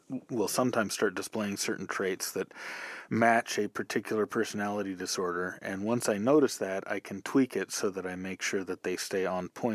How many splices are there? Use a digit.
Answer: 0